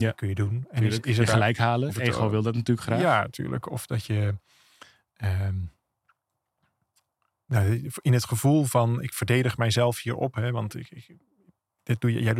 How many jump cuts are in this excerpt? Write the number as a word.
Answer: one